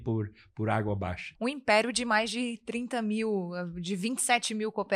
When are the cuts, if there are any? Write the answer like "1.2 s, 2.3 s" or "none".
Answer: 1.3 s